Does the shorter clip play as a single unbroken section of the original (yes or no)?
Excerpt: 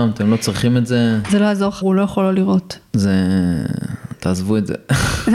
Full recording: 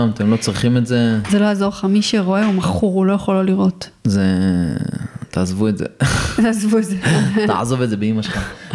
no